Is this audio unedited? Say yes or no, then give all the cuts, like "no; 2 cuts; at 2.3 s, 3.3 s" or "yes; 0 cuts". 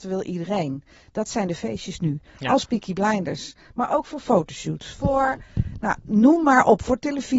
yes; 0 cuts